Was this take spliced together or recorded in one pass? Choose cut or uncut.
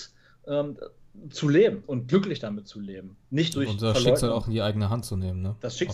cut